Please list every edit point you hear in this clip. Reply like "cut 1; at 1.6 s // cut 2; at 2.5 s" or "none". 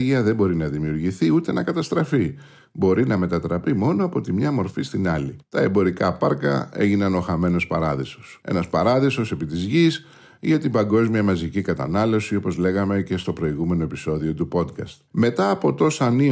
cut 1; at 5.4 s

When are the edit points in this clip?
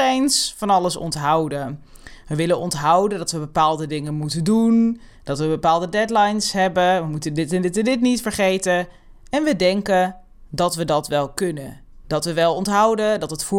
cut 1; at 12.0 s

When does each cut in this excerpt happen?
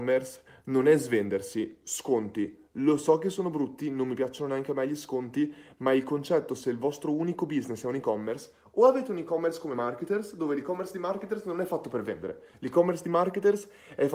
none

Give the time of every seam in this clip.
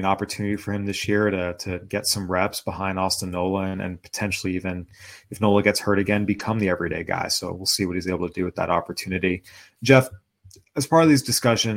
none

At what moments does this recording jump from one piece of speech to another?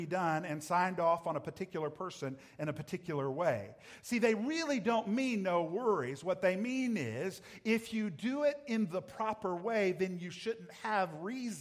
none

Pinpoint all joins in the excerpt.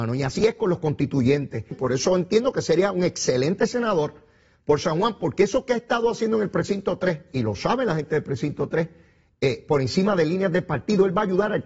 cut 1; at 1.7 s

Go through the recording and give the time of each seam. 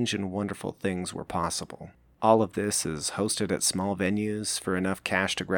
cut 1; at 2.1 s

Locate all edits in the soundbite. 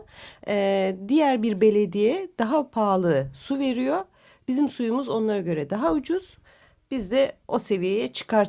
none

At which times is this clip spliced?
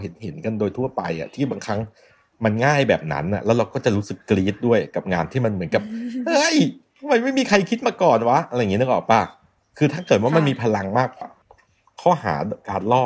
cut 1; at 11.2 s

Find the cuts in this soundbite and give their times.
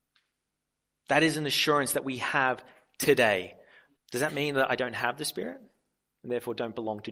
cut 1; at 4.0 s

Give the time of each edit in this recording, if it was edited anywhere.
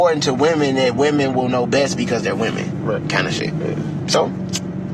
none

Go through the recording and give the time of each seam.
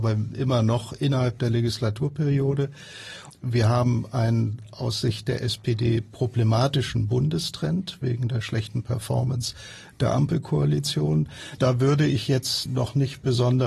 cut 1; at 3.3 s // cut 2; at 11.6 s // cut 3; at 12.7 s

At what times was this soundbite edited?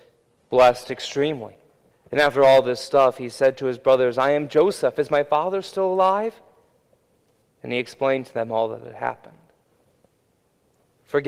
cut 1; at 1.9 s // cut 2; at 7.4 s

